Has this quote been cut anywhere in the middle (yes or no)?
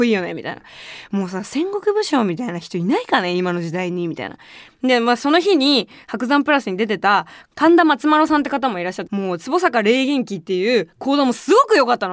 yes